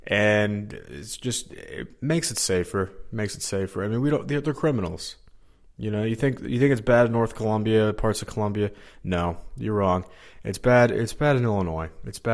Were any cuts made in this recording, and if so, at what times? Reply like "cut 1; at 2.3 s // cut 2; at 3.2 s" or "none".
none